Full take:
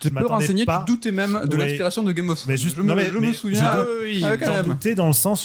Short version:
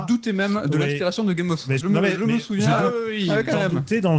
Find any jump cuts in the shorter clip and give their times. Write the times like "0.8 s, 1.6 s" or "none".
1.8 s